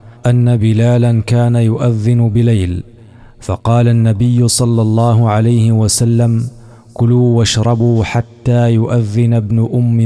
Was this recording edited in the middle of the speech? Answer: no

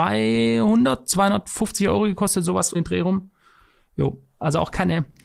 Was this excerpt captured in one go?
no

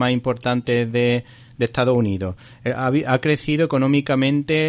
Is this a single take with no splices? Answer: yes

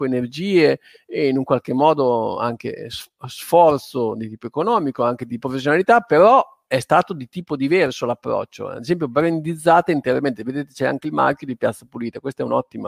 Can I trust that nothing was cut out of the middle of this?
yes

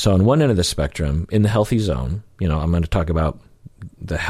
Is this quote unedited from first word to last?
yes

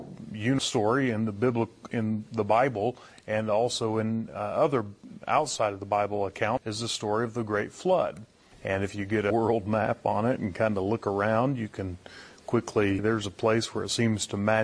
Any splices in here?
yes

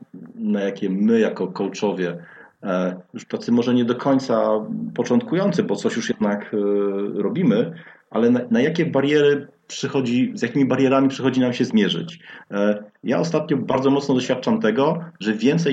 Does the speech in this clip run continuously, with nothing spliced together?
yes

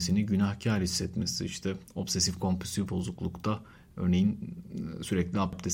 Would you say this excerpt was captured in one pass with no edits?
yes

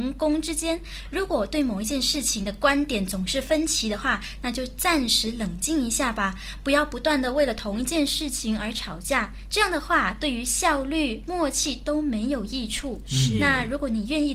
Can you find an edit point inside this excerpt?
no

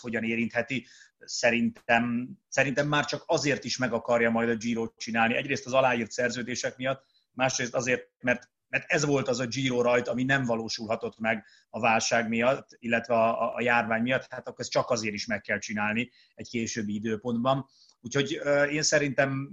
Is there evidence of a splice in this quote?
no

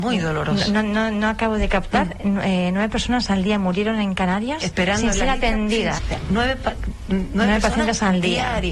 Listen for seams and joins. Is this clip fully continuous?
no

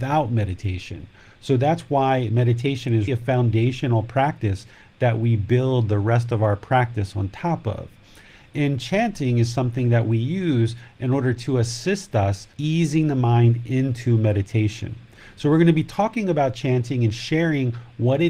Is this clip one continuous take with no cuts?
no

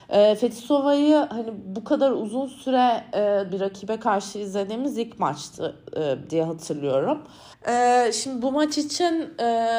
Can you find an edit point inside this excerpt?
yes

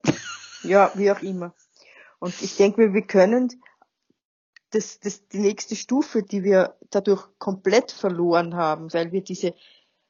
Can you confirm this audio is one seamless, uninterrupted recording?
no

